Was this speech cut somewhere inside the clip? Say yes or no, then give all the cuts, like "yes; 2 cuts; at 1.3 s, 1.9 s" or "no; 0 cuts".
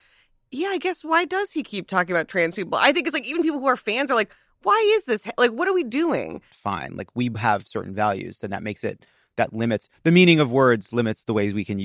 yes; 1 cut; at 6.5 s